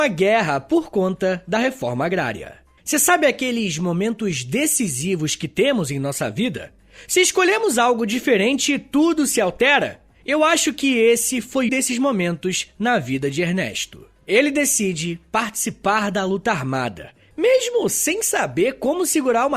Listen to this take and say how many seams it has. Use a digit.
2